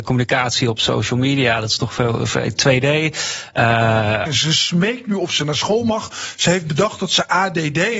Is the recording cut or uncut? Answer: cut